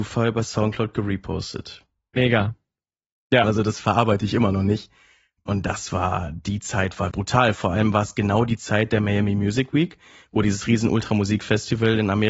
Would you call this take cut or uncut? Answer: cut